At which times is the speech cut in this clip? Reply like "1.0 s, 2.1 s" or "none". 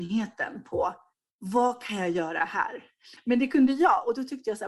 3.2 s